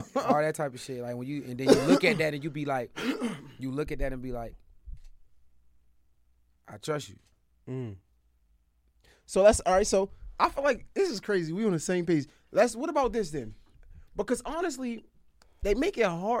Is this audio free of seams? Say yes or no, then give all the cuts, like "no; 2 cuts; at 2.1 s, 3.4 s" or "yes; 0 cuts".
yes; 0 cuts